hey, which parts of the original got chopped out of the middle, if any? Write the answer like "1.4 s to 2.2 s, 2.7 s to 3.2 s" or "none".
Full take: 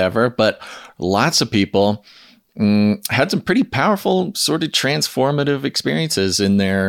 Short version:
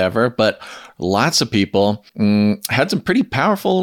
2.1 s to 2.5 s